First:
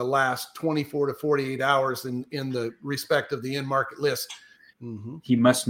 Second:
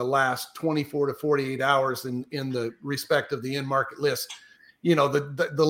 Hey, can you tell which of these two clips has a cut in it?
first; 1 cut; at 4.7 s

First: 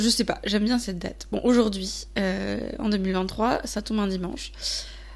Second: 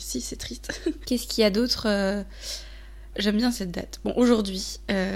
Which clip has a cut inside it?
second; 2 cuts; at 1.0 s, 3.1 s

